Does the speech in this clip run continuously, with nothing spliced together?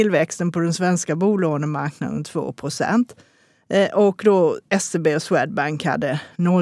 yes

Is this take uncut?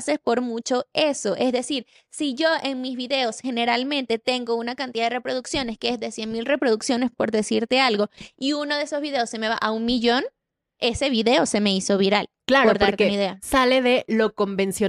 yes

